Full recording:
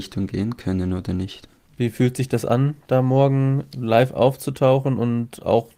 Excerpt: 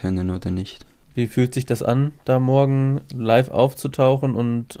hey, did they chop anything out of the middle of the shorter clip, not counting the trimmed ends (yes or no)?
no